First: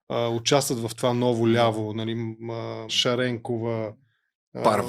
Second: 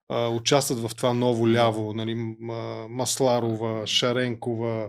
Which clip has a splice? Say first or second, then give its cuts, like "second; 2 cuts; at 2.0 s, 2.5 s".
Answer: first; 1 cut; at 2.9 s